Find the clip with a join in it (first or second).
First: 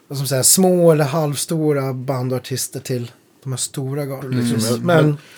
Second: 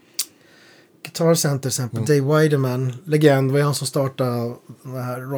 first